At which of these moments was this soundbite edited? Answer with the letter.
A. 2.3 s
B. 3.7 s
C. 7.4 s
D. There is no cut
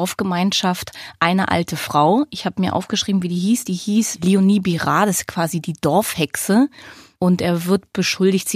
D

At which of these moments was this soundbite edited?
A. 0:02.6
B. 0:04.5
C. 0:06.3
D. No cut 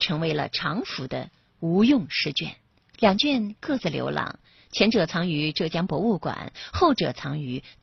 D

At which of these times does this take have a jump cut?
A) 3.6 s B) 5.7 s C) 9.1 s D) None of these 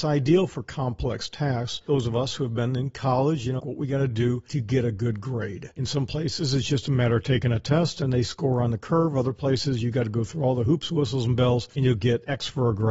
A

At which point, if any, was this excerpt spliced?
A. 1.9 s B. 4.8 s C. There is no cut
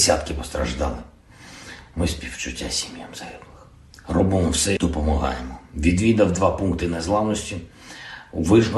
B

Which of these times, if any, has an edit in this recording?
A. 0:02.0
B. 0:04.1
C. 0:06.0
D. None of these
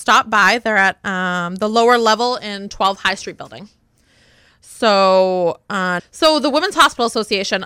C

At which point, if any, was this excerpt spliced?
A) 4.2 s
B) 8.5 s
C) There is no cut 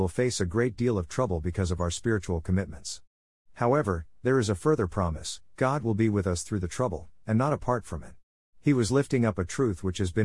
B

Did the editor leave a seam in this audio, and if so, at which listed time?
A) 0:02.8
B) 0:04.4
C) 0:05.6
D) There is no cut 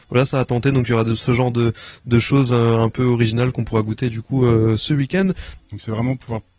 C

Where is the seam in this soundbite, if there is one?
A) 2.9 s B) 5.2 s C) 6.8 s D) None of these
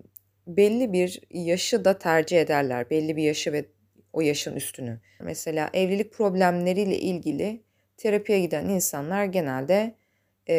B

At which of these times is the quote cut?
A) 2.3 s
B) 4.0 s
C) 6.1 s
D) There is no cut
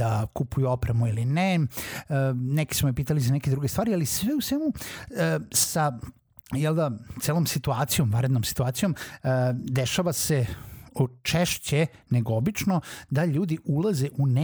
D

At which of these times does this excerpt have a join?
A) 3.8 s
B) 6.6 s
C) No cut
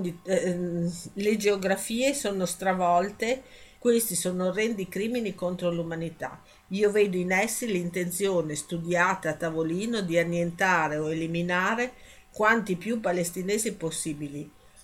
A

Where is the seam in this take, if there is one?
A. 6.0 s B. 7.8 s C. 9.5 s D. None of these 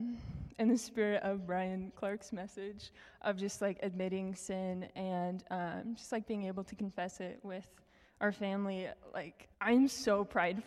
C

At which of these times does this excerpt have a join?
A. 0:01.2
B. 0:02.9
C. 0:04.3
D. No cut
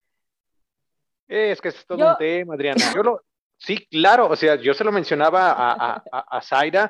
B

